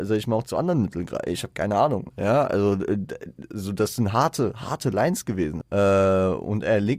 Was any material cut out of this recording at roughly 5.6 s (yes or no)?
yes